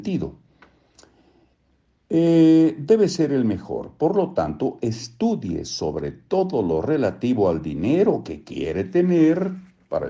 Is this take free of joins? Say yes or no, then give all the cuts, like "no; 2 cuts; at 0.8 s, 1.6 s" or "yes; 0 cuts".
yes; 0 cuts